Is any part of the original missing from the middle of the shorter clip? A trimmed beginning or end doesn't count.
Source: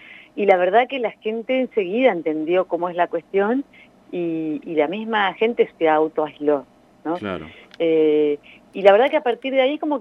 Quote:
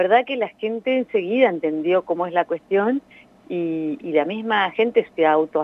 no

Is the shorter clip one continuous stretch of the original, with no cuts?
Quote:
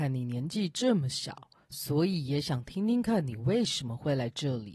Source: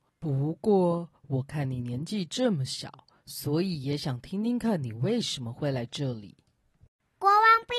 yes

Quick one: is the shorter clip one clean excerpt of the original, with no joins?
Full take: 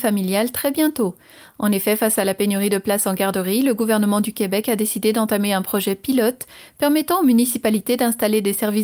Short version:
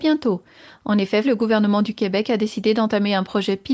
no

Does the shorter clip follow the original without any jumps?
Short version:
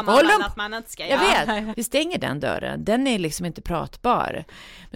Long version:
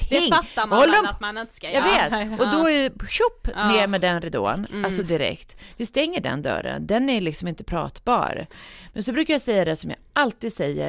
no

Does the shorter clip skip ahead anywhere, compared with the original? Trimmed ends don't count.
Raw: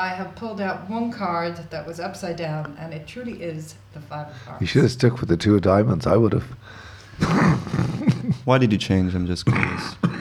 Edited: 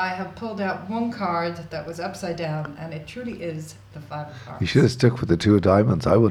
no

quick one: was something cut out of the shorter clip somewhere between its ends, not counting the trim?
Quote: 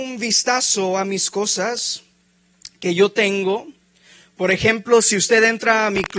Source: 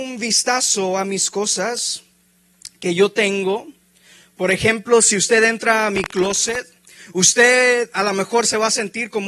no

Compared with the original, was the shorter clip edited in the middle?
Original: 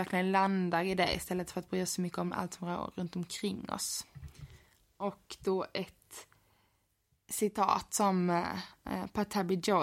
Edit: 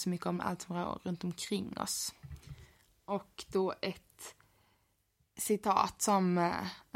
no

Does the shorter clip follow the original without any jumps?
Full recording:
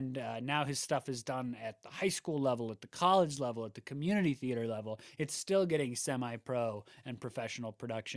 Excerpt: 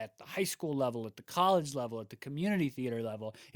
yes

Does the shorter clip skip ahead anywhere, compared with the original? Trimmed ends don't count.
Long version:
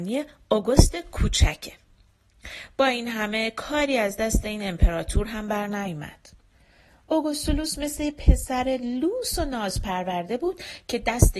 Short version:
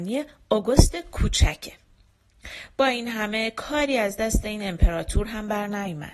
no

